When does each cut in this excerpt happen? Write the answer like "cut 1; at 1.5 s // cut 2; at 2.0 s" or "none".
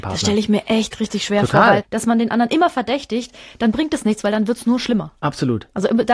cut 1; at 1.8 s